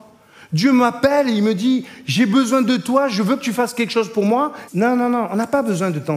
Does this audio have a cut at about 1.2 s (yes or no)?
no